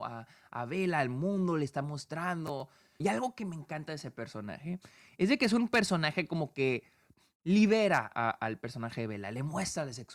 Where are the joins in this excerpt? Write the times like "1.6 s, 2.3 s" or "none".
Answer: 3.0 s, 8.1 s